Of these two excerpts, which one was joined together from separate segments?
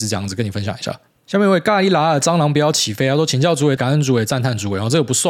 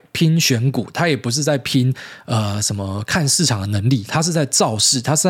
first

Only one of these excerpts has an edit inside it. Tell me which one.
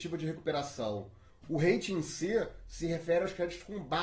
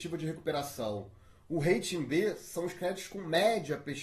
first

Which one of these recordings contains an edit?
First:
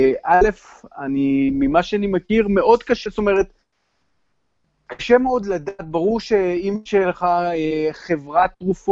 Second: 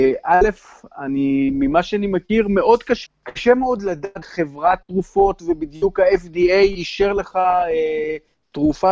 second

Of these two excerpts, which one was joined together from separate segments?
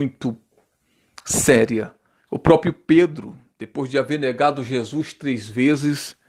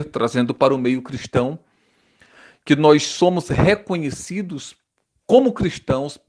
first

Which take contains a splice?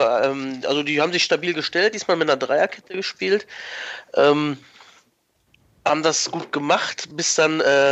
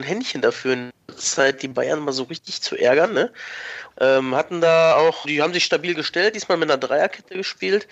second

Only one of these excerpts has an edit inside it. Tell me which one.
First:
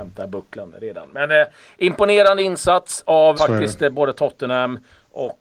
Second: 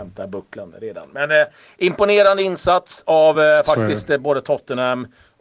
first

